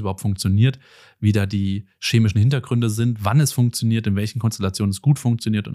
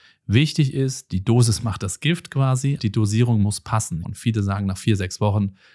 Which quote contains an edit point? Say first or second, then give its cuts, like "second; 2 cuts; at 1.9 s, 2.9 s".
second; 2 cuts; at 2.8 s, 4.0 s